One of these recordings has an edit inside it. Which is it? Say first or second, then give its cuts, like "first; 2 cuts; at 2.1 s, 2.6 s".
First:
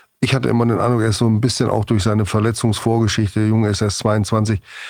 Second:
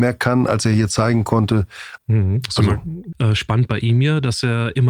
second; 2 cuts; at 2.0 s, 3.1 s